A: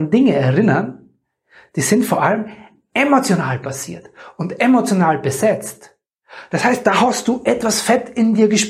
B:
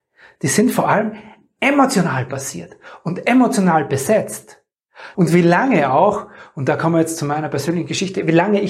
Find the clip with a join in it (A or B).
B